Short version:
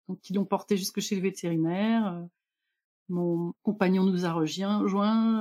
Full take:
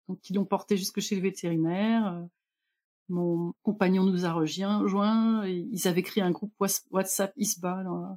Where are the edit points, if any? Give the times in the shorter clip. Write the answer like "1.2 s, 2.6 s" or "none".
none